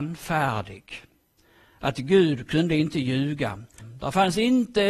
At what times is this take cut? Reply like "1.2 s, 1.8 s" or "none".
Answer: 3.8 s

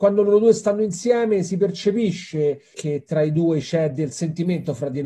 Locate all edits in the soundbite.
2.7 s, 4.1 s

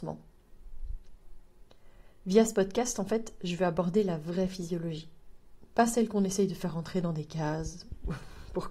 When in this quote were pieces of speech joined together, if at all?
none

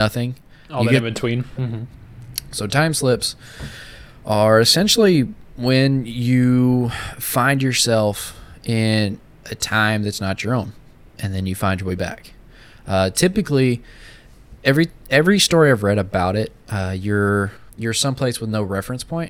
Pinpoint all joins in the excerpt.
1.6 s

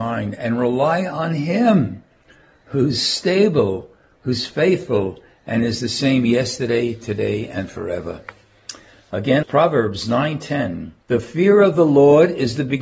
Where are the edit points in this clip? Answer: 9.4 s, 11.0 s

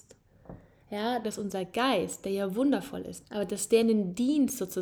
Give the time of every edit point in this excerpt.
1.2 s, 3.2 s

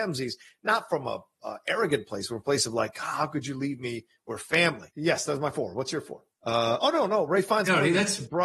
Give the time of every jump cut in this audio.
4.9 s, 6.3 s

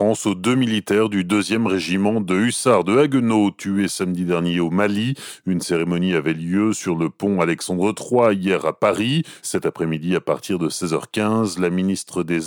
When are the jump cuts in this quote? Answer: 9.4 s

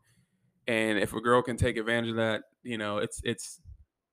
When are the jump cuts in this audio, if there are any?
none

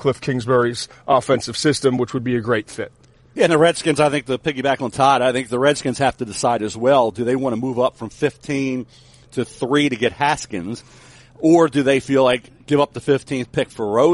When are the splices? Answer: none

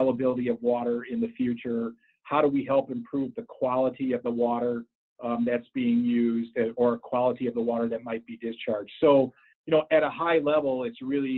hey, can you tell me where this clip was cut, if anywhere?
none

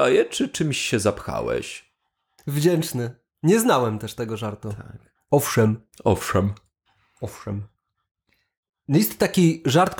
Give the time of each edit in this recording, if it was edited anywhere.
2.4 s

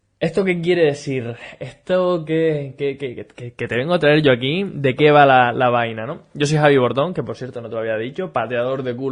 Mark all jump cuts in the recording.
none

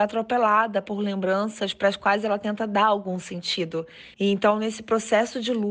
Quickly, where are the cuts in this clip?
4.1 s

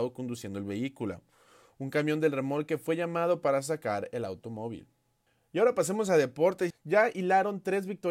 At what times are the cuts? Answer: 6.7 s

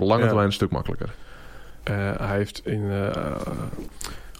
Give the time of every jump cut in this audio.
1.8 s

